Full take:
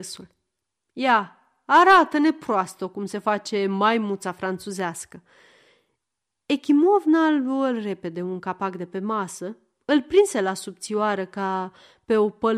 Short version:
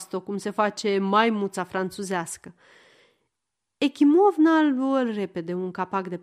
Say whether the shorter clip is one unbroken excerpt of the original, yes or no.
yes